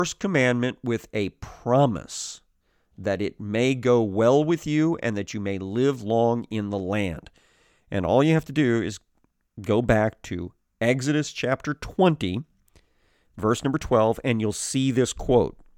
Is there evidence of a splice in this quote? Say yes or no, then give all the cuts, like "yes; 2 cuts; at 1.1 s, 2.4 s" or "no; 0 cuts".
no; 0 cuts